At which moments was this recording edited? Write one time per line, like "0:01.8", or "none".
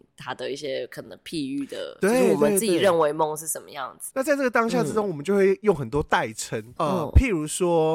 0:04.1
0:06.8